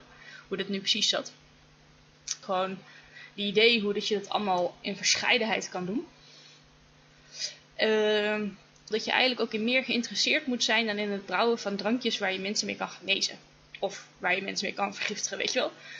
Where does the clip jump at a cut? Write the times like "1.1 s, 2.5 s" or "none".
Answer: 2.4 s, 8.9 s